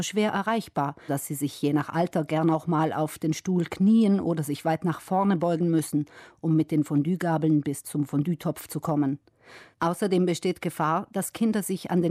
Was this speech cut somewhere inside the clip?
yes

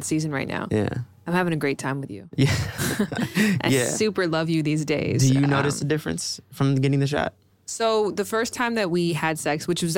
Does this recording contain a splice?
no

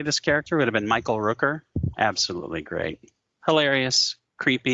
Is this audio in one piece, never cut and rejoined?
no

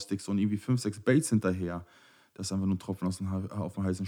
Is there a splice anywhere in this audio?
no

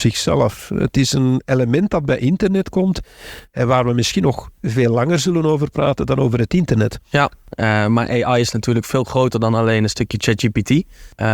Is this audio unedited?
yes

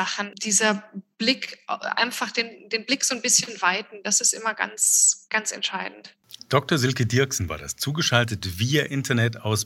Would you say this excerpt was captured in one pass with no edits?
yes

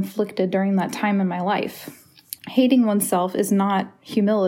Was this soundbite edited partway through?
yes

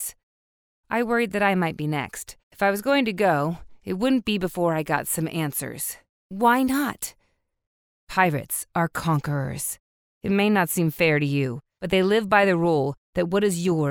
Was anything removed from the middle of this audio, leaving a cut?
yes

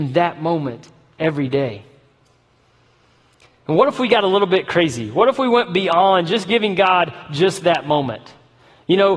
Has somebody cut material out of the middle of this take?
no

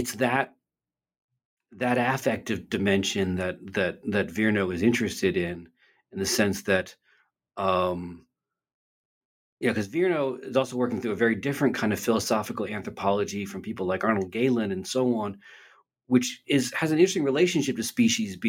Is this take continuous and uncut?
yes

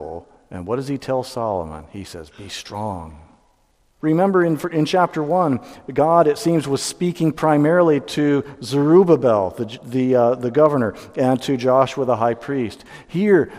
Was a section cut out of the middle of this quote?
yes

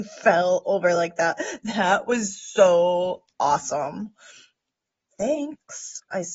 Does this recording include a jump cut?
no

